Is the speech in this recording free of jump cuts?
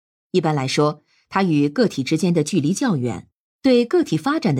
yes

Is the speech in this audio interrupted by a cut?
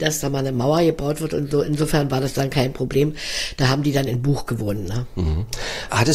yes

